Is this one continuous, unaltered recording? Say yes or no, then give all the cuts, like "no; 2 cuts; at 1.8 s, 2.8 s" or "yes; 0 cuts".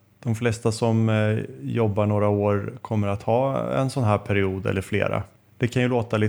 yes; 0 cuts